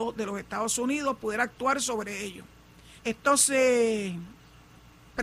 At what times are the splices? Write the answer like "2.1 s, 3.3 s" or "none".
3.0 s